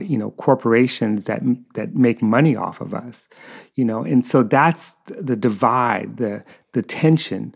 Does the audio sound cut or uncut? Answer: uncut